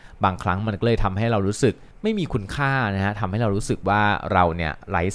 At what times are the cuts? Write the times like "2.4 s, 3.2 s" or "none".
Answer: 1.9 s